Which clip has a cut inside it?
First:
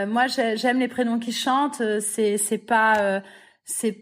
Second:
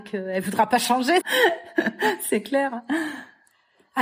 second; 1 cut; at 1.2 s

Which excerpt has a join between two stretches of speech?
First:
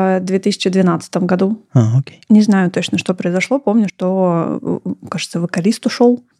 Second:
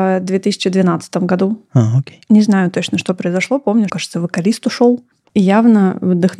second; 2 cuts; at 3.9 s, 5.2 s

